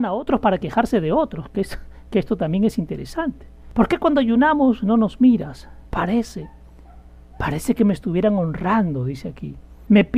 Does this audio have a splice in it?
yes; 1 cut; at 5.9 s

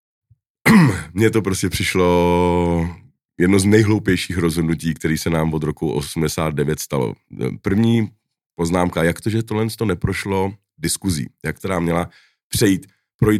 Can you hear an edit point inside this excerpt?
yes; 1 cut; at 11.6 s

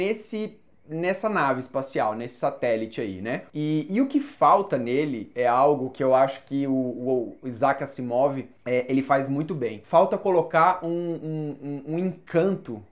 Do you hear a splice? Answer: no; 0 cuts

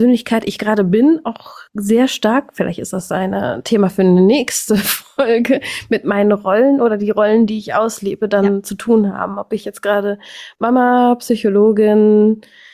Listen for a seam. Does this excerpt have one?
no; 0 cuts

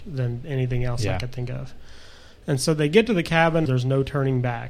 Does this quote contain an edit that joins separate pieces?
yes; 1 cut; at 3.7 s

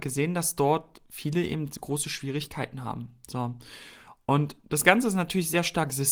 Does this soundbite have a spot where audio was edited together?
no; 0 cuts

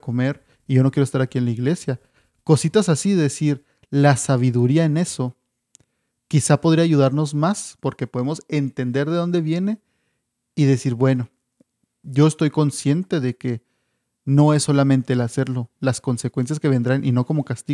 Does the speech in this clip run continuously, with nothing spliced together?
yes; 0 cuts

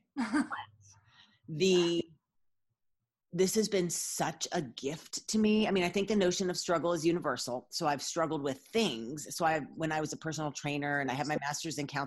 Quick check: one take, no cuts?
yes; 0 cuts

